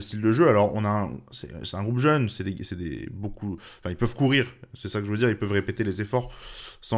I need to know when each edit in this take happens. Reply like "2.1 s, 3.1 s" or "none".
none